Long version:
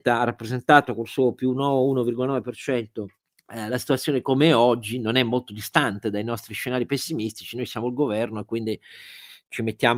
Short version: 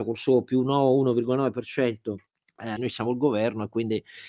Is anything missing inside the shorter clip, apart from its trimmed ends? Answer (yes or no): yes